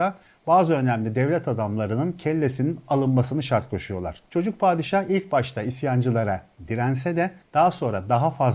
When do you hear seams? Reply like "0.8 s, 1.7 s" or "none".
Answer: 4.2 s